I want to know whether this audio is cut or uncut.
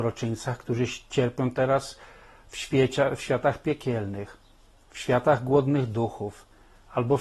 uncut